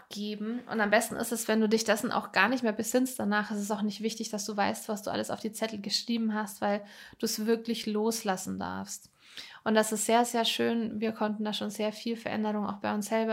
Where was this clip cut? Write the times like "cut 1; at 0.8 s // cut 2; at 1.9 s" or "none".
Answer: none